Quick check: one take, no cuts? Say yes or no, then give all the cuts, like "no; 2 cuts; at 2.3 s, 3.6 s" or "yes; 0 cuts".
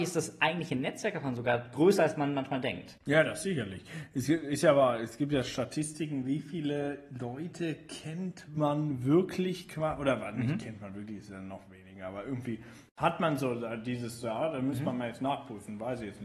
yes; 0 cuts